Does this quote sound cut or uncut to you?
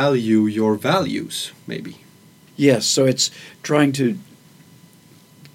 cut